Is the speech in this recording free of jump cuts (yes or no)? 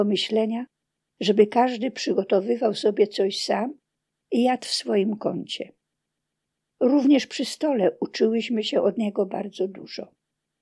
yes